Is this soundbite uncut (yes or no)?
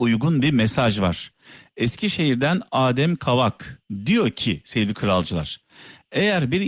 yes